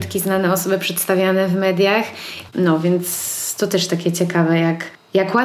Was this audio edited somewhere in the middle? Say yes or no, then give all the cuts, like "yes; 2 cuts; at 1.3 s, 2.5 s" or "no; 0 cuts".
yes; 1 cut; at 2.5 s